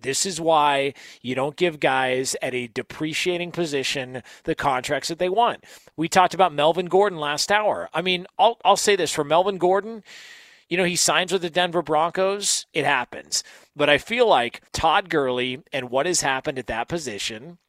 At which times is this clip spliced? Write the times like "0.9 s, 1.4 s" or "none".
12.7 s, 14.7 s